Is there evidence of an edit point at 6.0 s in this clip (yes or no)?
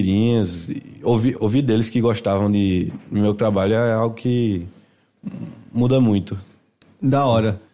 no